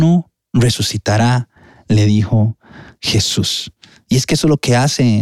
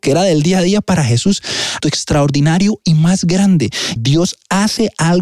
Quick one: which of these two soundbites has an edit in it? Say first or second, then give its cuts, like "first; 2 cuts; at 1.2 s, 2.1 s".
second; 2 cuts; at 1.8 s, 4.0 s